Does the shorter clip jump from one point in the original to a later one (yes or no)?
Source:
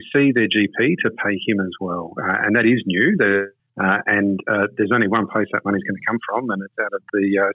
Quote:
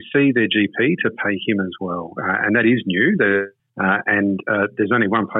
no